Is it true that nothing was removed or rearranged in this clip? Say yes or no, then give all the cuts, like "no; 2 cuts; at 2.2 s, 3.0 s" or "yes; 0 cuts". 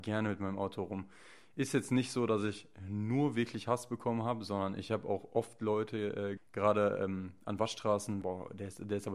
no; 2 cuts; at 6.4 s, 8.2 s